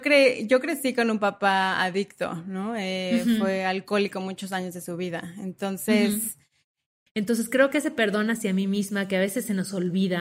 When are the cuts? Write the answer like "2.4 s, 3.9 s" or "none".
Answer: 7.1 s